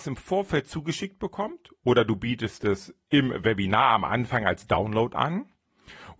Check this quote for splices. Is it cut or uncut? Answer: uncut